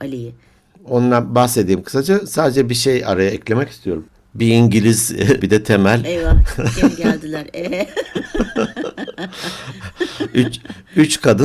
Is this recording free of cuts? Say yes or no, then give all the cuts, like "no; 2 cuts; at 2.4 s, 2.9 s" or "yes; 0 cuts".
no; 1 cut; at 5.4 s